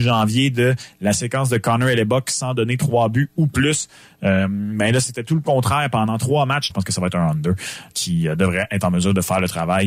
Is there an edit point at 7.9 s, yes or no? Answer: yes